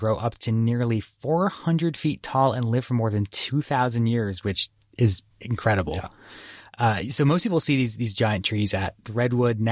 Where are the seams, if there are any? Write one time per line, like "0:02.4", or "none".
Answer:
0:05.3